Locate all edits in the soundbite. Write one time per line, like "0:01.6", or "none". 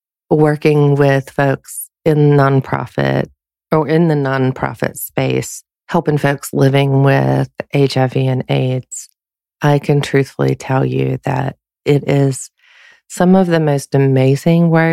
none